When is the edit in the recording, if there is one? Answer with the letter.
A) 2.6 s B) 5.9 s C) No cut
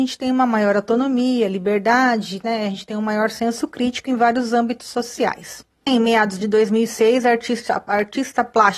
B